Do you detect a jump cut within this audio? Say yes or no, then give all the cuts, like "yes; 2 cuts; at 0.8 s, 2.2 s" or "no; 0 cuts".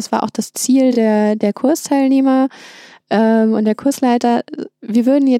no; 0 cuts